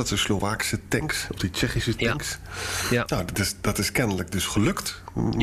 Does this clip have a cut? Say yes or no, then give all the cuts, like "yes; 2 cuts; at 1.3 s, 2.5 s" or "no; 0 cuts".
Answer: no; 0 cuts